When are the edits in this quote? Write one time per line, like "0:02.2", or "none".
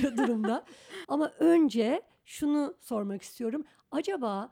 0:01.0